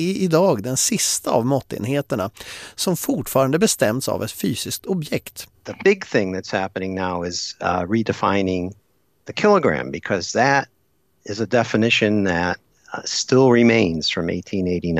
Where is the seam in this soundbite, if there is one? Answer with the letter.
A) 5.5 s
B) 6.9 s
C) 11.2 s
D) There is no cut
A